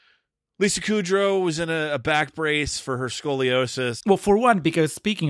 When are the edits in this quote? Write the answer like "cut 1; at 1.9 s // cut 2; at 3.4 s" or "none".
cut 1; at 4.0 s